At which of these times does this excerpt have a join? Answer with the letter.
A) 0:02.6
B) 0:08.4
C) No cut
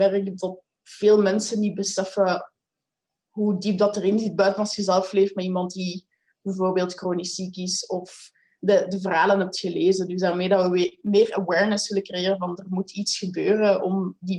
C